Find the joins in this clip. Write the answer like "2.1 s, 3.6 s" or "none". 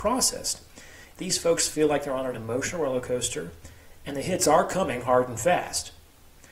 1.1 s, 4.0 s